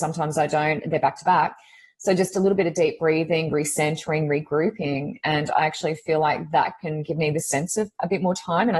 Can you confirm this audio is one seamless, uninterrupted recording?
yes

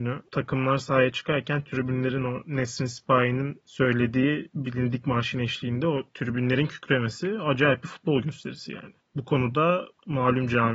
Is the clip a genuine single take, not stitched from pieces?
yes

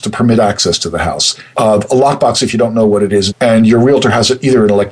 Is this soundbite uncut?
no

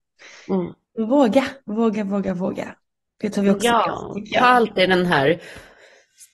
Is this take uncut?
yes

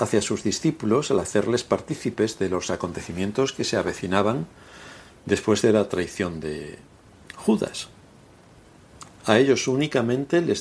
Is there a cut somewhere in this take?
yes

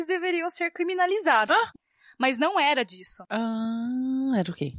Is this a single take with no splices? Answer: yes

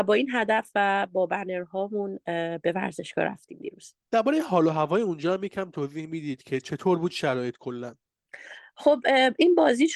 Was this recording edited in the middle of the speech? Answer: yes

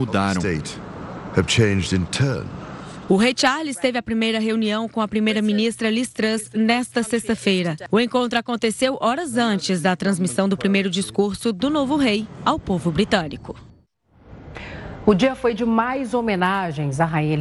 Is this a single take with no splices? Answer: yes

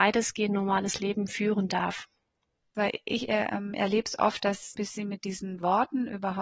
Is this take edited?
yes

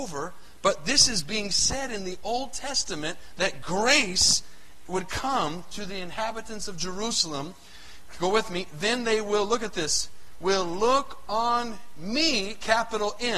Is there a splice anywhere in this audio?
no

